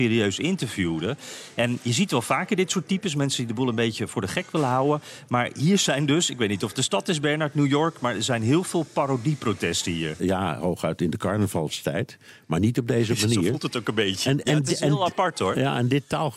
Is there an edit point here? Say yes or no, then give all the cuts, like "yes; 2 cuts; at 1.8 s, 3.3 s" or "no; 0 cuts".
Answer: yes; 1 cut; at 10.2 s